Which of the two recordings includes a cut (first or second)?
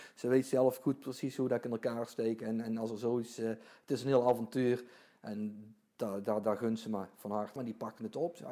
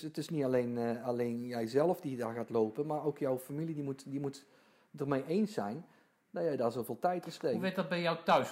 first